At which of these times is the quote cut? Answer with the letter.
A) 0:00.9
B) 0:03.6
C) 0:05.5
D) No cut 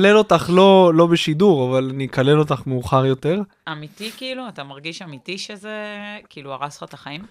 B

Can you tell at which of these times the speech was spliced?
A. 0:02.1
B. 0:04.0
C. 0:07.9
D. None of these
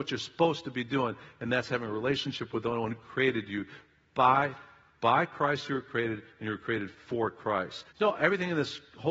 C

